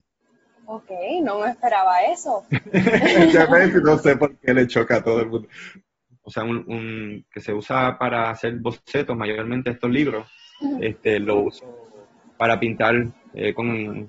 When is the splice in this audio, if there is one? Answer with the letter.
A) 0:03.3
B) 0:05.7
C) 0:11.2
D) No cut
B